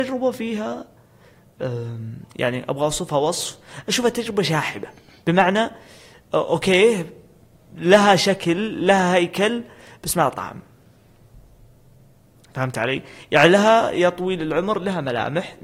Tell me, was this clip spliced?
no; 0 cuts

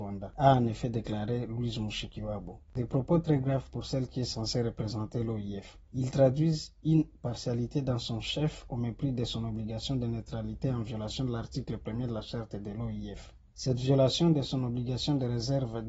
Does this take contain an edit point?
no; 0 cuts

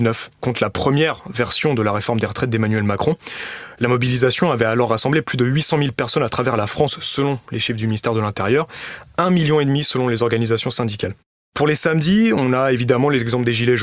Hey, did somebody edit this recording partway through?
no; 0 cuts

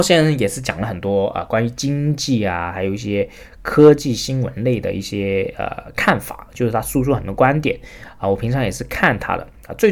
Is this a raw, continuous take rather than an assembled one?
yes; 0 cuts

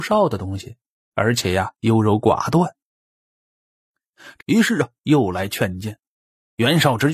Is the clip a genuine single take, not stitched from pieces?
no; 2 cuts; at 1.0 s, 4.4 s

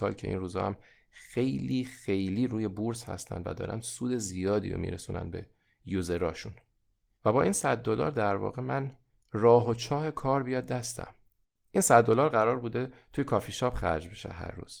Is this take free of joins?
yes; 0 cuts

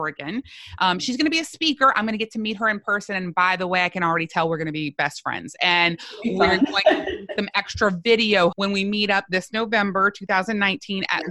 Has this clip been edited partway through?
yes; 1 cut; at 8.5 s

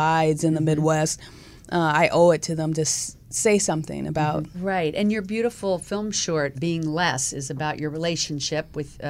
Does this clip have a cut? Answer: yes; 2 cuts; at 4.5 s, 6.5 s

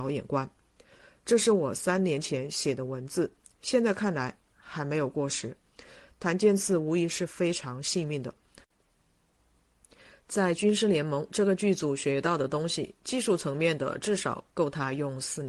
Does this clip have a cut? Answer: no; 0 cuts

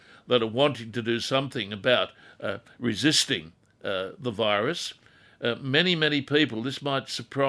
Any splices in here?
no; 0 cuts

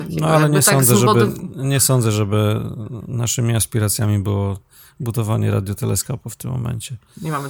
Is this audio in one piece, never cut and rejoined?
yes; 0 cuts

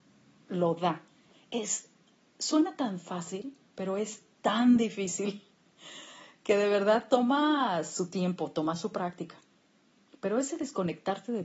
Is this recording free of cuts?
no; 1 cut; at 1.3 s

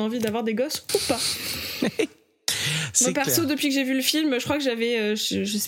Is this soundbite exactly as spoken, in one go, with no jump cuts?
yes; 0 cuts

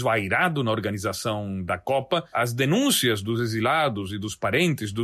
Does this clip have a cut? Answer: no; 0 cuts

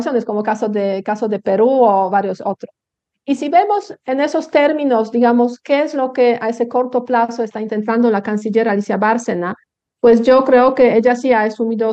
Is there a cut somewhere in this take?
no; 0 cuts

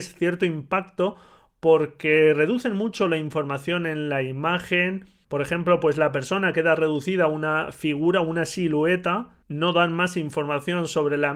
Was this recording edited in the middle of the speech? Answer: no; 0 cuts

